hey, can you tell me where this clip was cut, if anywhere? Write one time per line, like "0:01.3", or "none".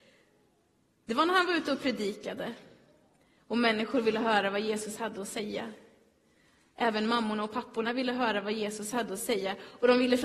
none